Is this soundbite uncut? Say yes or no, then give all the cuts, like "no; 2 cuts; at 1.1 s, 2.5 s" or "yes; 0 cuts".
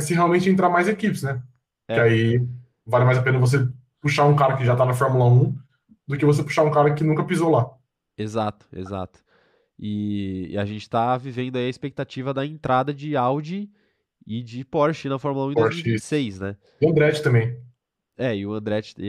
yes; 0 cuts